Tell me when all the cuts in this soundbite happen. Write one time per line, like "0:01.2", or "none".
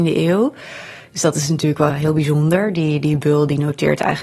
0:01.9